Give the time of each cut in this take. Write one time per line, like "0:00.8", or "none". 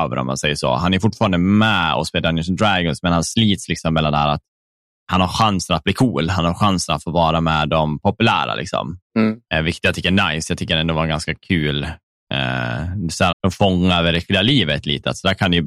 0:09.0
0:13.3